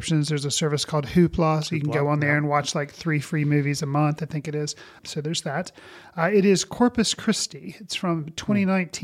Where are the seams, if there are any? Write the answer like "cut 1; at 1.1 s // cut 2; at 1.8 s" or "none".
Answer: cut 1; at 5.0 s